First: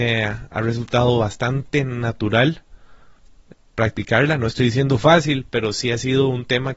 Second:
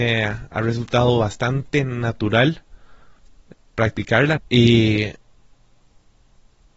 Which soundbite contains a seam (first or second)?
second